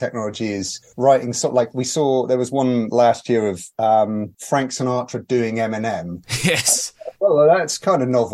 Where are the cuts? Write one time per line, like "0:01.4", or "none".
none